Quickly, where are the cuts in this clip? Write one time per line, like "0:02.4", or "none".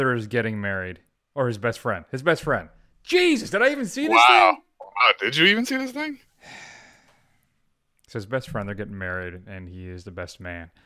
none

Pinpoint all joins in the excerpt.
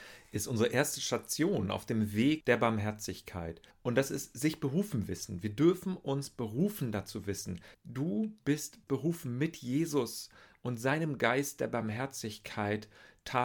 0:03.7
0:07.7
0:08.8

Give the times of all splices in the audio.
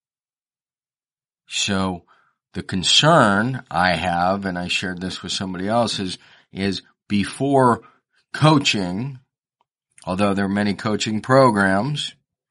none

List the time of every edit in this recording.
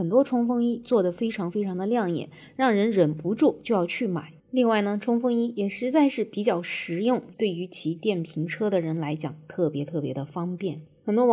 0:04.4
0:07.3

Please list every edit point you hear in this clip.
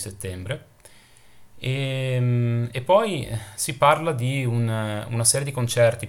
none

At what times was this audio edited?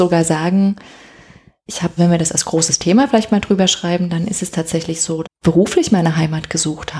0:02.0
0:05.2

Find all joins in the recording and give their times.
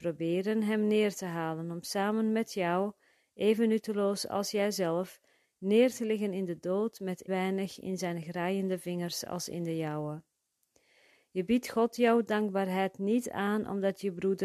0:07.3

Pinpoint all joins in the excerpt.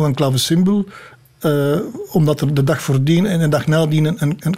none

